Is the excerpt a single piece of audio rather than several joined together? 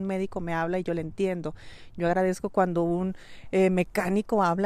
yes; 0 cuts

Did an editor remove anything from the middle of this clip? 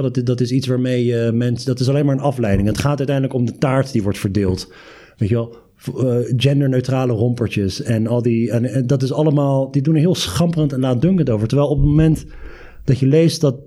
no; 0 cuts

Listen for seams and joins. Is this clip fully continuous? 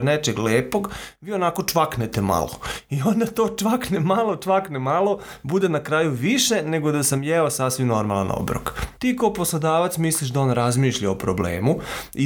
no; 1 cut; at 9.0 s

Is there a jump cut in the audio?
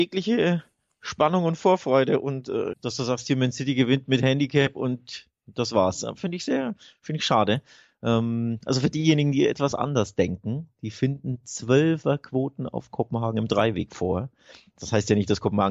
yes; 1 cut; at 2.7 s

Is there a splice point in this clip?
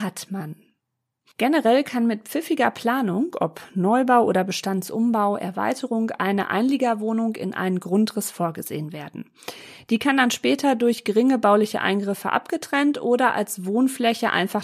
no; 0 cuts

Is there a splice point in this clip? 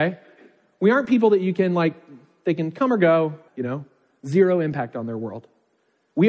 yes; 1 cut; at 3.5 s

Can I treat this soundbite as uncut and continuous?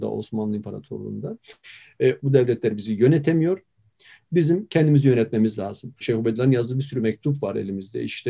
no; 2 cuts; at 2.2 s, 6.0 s

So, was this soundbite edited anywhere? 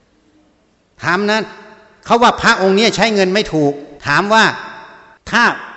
yes; 1 cut; at 4.0 s

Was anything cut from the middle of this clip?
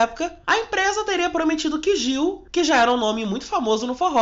no; 0 cuts

